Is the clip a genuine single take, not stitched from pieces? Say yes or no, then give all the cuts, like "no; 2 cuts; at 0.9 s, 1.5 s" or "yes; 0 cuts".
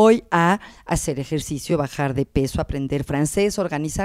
yes; 0 cuts